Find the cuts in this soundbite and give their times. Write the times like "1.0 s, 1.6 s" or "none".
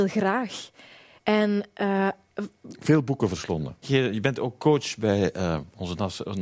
3.8 s